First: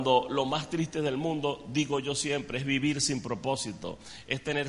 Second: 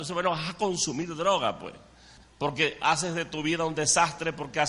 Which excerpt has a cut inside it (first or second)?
second